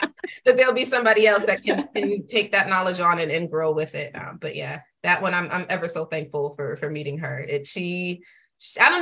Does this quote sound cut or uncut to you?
uncut